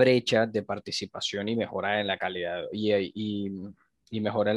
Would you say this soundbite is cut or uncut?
uncut